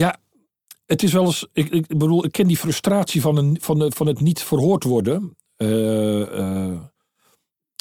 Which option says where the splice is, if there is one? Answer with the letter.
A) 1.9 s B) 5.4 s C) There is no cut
C